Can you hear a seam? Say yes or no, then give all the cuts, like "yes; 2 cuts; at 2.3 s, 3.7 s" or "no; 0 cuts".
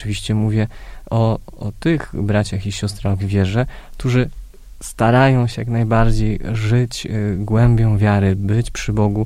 no; 0 cuts